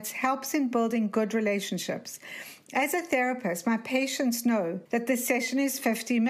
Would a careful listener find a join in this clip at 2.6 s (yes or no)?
no